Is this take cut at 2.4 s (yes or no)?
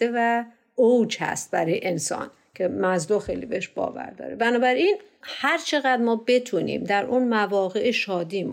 no